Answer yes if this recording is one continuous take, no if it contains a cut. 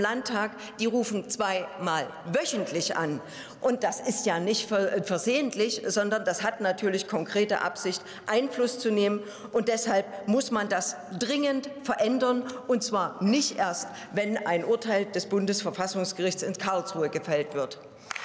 yes